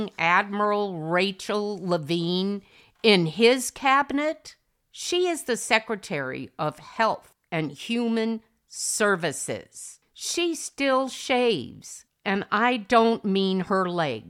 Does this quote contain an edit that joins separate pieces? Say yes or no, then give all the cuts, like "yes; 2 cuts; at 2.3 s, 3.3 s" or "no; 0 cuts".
no; 0 cuts